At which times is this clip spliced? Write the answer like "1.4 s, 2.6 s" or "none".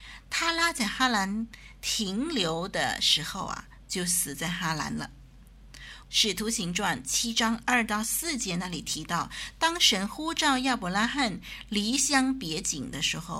6.0 s